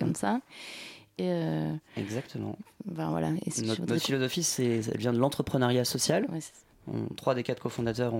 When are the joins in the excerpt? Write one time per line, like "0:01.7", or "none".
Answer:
0:01.2